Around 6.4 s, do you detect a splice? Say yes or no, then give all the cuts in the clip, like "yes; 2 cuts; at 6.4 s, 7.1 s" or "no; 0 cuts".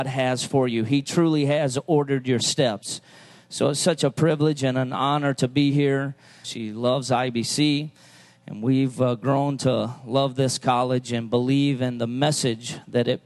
yes; 1 cut; at 6.4 s